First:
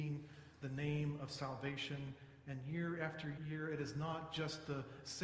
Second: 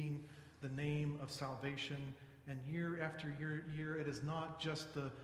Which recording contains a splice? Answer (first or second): first